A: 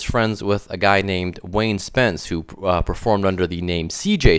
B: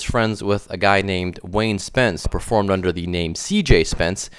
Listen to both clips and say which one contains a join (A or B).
B